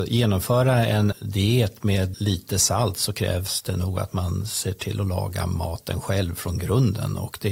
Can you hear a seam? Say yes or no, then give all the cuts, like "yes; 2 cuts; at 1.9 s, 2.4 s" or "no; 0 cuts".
yes; 2 cuts; at 1.1 s, 2.1 s